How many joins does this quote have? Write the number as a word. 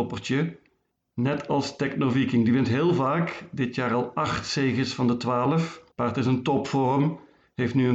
one